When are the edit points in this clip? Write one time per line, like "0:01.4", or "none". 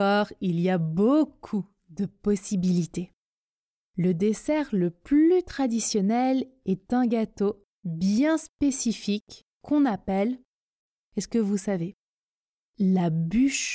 none

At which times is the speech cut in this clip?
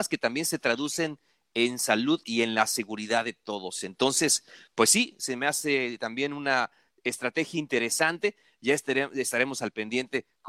none

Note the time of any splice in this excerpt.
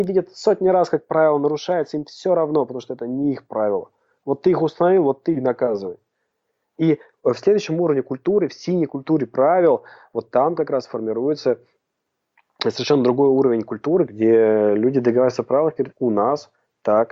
0:14.1
0:15.9

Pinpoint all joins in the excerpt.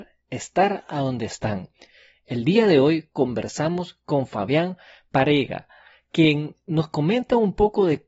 none

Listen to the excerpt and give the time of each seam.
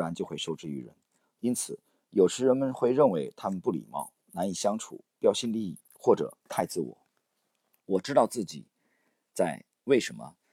0:01.2
0:07.8

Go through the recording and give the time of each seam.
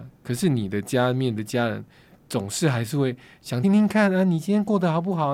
0:03.6

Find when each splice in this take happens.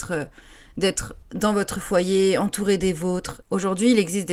0:01.2
0:03.4

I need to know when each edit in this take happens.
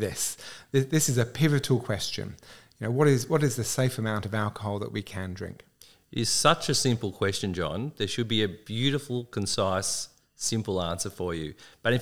none

